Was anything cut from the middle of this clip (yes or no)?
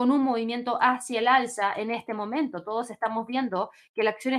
no